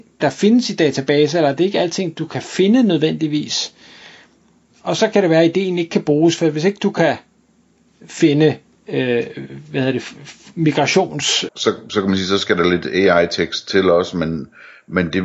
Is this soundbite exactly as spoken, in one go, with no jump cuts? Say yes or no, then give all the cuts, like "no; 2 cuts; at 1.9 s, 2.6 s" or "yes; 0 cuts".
no; 1 cut; at 11.5 s